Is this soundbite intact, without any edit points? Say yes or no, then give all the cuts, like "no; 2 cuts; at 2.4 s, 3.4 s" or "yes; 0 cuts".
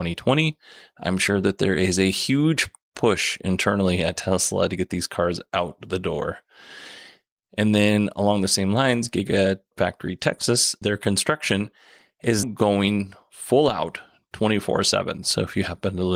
no; 3 cuts; at 10.8 s, 12.4 s, 15.2 s